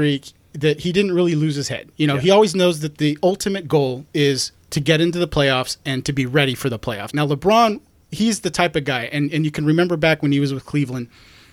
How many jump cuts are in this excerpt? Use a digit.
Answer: 2